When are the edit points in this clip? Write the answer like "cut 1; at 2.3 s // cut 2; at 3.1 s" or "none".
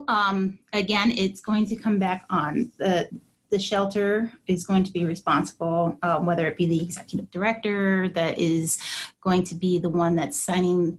none